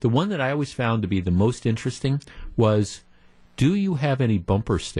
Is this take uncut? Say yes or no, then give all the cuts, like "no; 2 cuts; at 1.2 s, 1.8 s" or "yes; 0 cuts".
yes; 0 cuts